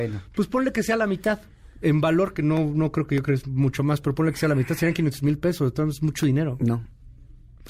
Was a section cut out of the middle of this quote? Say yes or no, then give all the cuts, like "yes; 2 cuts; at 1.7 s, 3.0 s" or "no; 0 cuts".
no; 0 cuts